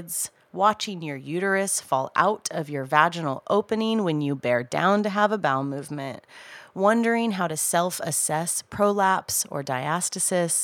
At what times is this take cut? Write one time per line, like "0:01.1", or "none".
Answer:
none